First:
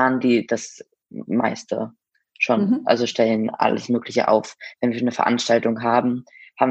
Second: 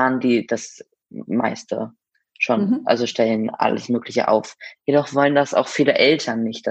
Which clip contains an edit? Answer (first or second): second